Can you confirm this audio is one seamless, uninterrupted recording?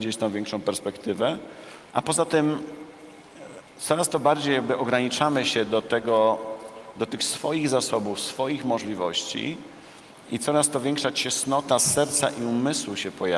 no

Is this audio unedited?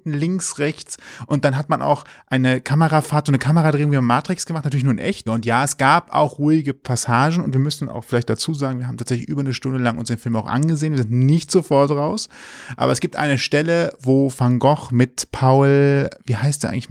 no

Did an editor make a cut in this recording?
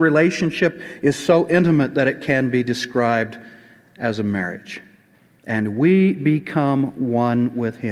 no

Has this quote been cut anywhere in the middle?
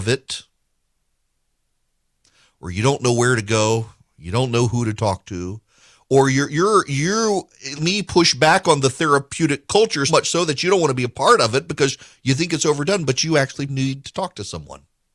yes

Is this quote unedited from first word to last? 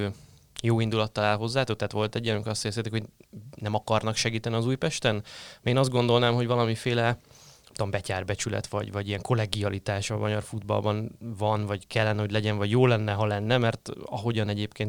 yes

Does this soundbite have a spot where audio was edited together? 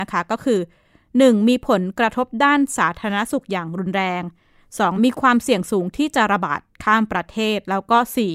yes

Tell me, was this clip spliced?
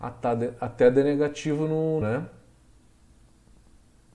yes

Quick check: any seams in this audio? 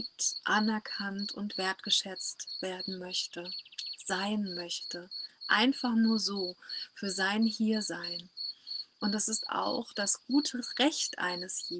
no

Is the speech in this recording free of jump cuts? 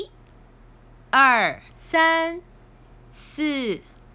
no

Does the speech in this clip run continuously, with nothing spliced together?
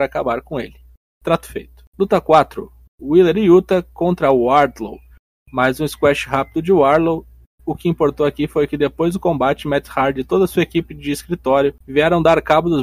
yes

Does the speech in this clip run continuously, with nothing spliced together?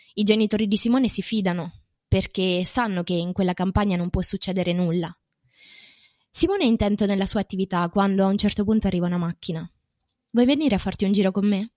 yes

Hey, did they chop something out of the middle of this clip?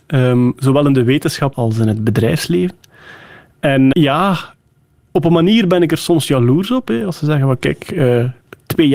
yes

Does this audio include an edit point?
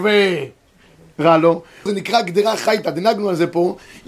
yes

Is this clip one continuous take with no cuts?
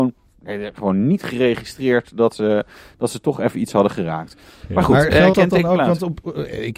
yes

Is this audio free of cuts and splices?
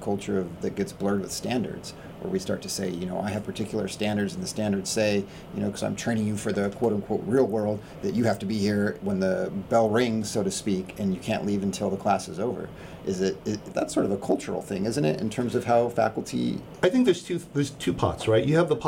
no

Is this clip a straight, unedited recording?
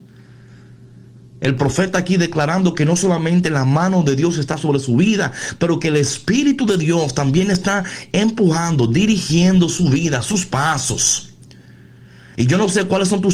yes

